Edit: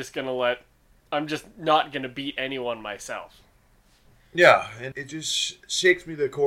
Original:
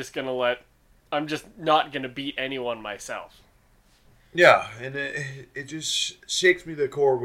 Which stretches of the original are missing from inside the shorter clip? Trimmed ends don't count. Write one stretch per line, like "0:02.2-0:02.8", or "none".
0:04.9-0:05.5